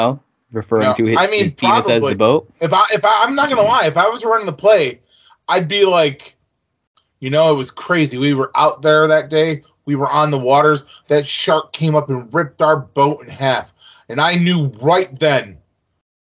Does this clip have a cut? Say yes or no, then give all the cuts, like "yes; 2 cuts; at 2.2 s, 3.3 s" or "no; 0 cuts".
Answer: no; 0 cuts